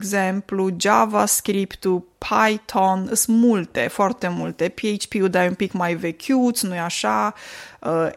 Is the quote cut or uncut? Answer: uncut